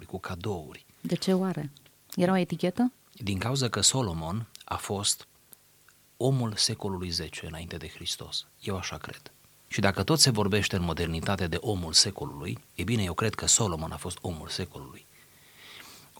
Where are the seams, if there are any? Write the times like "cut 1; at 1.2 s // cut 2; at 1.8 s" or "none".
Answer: cut 1; at 9.7 s // cut 2; at 12.7 s

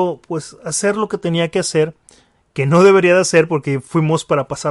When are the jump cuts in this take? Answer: none

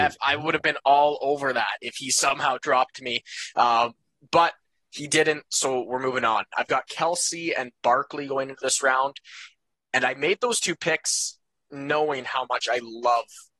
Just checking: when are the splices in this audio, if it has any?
none

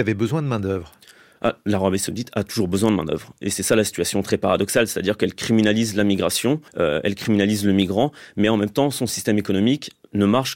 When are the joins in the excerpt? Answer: cut 1; at 6.7 s

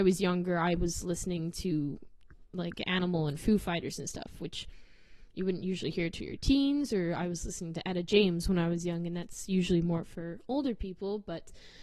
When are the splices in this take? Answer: none

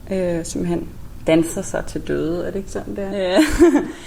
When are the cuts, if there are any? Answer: cut 1; at 3.1 s

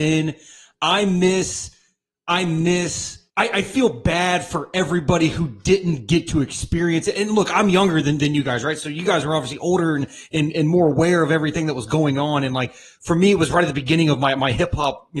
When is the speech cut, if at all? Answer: cut 1; at 3.3 s

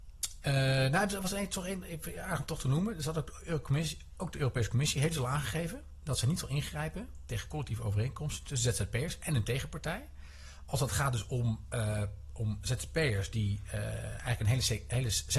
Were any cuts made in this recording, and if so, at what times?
none

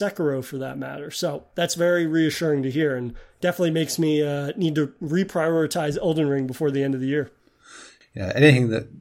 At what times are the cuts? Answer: cut 1; at 8.0 s

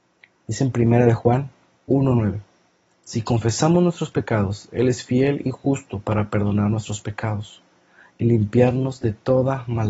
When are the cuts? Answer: none

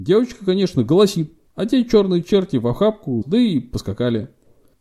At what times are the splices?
cut 1; at 3.2 s

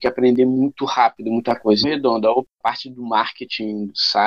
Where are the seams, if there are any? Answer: cut 1; at 1.8 s

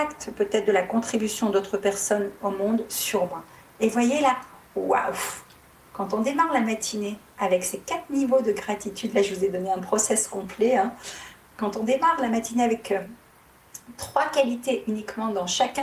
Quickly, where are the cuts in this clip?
none

